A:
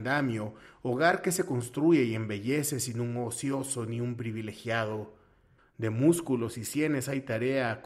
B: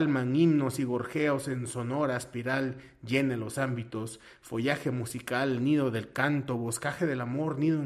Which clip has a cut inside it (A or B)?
A